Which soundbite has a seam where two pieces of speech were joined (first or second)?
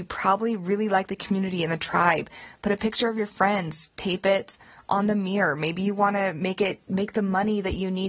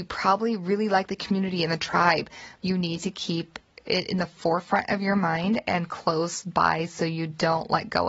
second